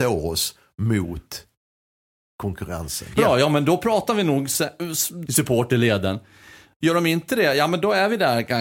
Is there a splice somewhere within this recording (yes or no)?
yes